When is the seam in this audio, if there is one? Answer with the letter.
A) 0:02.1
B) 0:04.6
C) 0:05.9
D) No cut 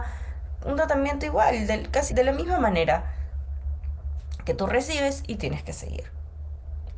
A